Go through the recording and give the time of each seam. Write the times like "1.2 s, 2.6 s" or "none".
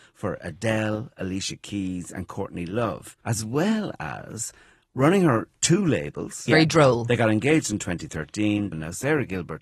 3.2 s, 6.5 s, 8.7 s